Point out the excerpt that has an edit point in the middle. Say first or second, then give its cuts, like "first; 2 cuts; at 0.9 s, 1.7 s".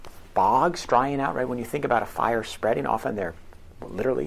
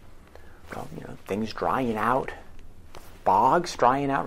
second; 1 cut; at 1.2 s